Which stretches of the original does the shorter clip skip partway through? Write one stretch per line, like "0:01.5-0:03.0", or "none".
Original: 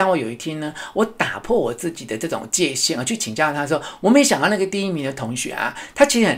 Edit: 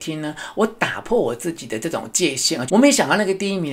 0:03.0-0:04.0